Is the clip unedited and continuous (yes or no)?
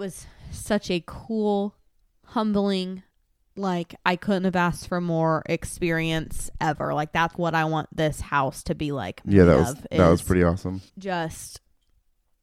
no